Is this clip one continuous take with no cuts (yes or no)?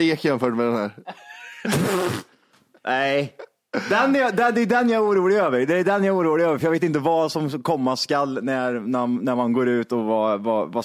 yes